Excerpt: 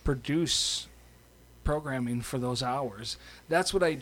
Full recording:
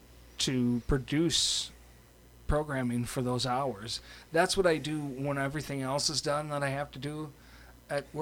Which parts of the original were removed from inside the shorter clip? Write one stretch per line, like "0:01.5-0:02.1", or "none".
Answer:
none